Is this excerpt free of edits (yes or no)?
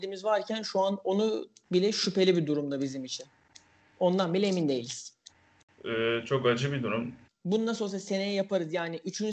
no